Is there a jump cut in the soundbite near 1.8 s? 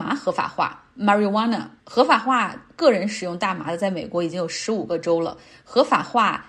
yes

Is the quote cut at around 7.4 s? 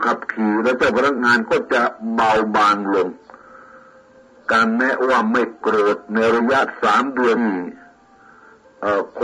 yes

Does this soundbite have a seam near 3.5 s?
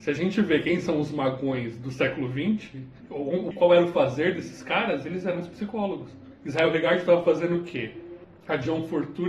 yes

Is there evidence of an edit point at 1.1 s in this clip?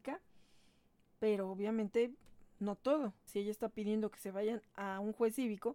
no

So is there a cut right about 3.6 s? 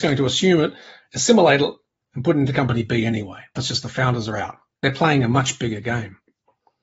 yes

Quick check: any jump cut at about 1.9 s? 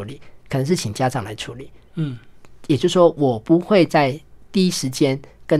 no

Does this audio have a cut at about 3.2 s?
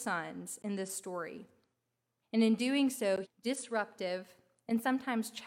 yes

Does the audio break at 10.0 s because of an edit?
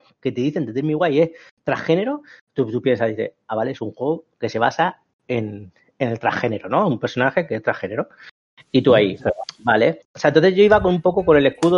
yes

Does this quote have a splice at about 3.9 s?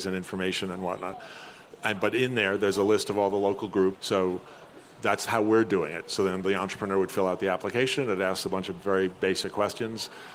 yes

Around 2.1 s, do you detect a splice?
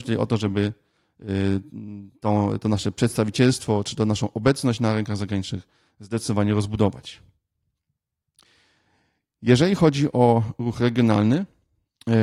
no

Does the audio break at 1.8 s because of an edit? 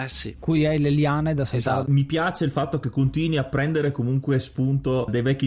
yes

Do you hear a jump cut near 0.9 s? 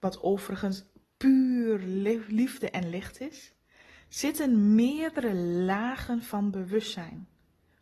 no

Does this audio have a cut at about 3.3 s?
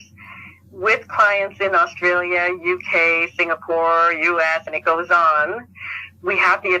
no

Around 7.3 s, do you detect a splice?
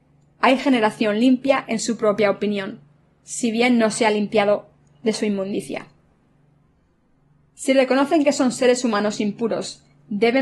no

